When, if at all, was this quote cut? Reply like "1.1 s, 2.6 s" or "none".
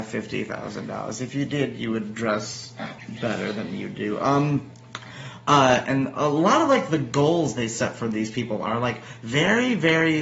none